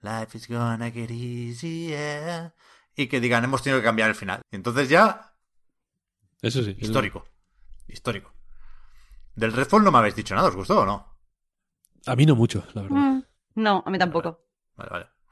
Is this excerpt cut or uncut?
cut